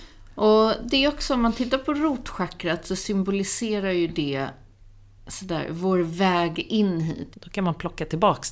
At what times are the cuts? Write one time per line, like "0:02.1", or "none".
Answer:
0:07.3